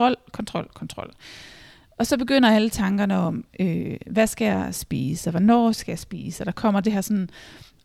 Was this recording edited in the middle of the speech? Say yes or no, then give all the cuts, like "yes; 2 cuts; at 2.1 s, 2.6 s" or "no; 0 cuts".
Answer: no; 0 cuts